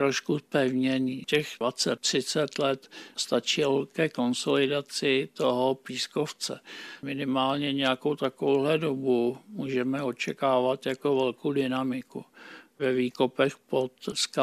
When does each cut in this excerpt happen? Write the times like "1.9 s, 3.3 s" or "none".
none